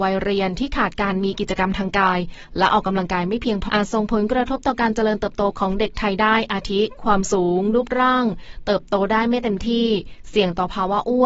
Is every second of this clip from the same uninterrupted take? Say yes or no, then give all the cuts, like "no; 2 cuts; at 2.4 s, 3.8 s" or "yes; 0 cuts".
no; 1 cut; at 3.7 s